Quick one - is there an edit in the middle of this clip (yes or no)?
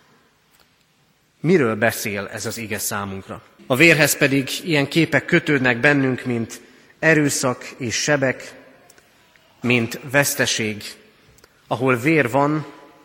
yes